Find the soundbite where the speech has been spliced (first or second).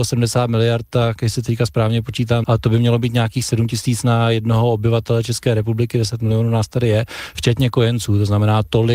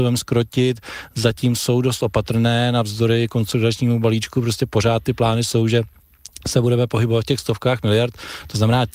first